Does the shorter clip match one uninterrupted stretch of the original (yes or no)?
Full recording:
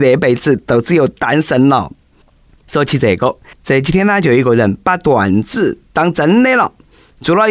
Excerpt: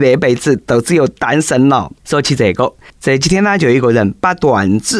no